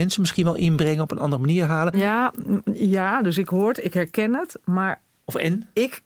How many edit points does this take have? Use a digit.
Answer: 1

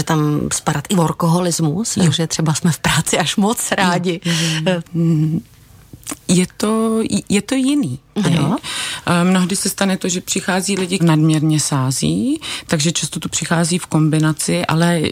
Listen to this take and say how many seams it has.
3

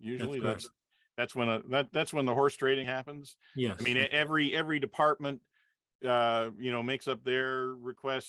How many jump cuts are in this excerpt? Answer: 1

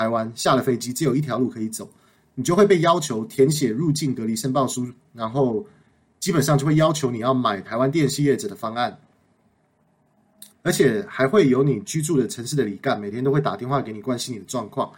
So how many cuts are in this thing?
1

